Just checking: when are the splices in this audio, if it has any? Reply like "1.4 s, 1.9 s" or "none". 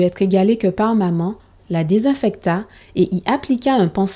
1.6 s